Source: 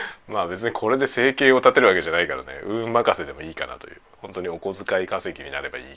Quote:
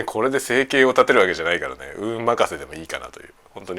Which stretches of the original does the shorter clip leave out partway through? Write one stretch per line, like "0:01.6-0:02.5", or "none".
none